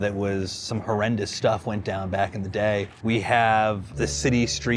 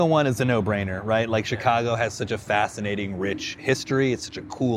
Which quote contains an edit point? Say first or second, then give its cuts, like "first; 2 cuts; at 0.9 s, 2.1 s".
first; 1 cut; at 3.0 s